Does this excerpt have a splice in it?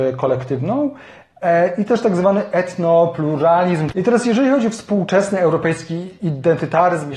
yes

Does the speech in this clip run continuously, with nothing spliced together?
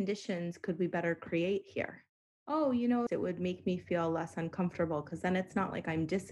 no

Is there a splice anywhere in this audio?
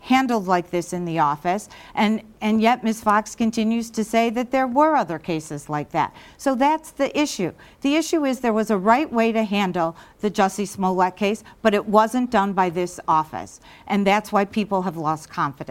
no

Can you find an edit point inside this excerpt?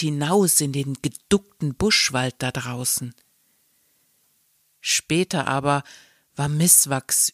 yes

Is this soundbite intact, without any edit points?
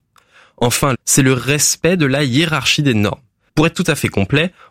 no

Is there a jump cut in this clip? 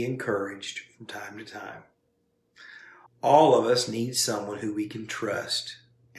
yes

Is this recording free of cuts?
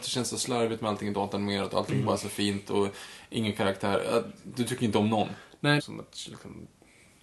no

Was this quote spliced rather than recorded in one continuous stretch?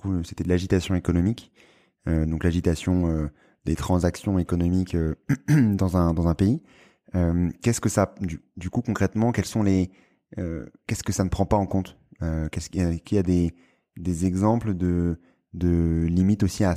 no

